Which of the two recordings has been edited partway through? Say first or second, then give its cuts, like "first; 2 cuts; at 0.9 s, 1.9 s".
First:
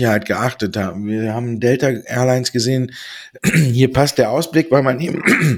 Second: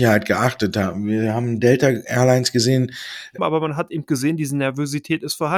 second; 1 cut; at 3.4 s